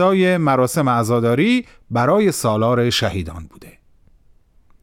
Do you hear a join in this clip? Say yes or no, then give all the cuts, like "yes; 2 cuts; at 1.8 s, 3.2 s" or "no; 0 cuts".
no; 0 cuts